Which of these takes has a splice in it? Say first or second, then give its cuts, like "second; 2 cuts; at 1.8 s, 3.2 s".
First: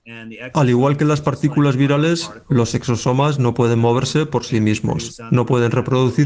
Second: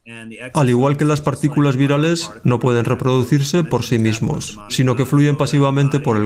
second; 2 cuts; at 2.4 s, 4.7 s